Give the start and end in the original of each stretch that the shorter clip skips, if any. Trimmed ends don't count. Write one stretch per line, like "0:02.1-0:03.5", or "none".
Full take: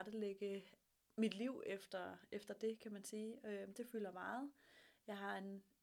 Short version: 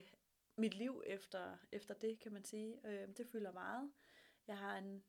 none